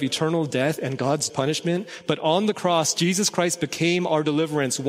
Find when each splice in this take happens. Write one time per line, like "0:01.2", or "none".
0:01.3